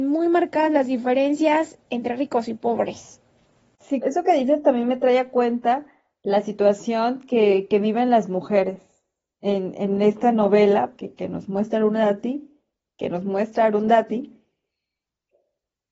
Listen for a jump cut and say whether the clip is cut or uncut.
cut